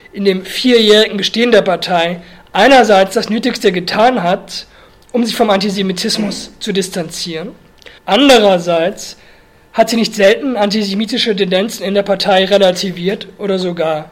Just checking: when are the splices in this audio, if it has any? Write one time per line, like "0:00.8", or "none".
0:08.0